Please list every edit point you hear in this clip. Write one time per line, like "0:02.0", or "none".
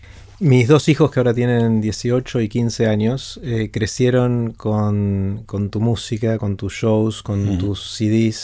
none